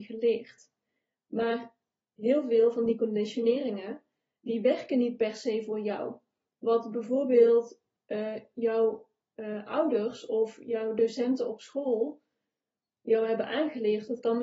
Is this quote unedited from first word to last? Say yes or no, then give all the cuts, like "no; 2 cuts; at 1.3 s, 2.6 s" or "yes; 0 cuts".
yes; 0 cuts